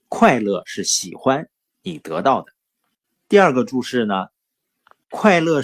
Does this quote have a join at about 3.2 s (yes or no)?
no